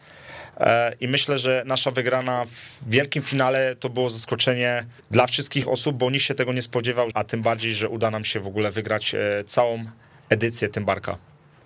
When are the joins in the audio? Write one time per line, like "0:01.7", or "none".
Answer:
0:05.0
0:07.1